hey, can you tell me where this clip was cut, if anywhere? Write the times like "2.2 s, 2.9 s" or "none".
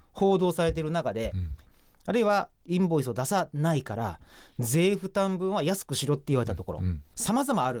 1.6 s